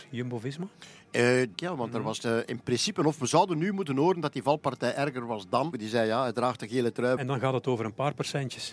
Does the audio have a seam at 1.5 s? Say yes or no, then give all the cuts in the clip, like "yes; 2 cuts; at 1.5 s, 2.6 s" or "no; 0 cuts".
yes; 3 cuts; at 1.5 s, 5.7 s, 7.2 s